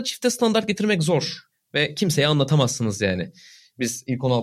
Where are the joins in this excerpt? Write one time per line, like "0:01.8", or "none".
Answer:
none